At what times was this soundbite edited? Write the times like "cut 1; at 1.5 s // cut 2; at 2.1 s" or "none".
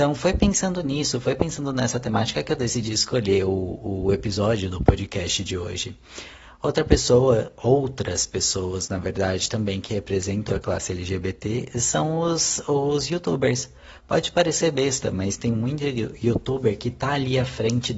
cut 1; at 10.5 s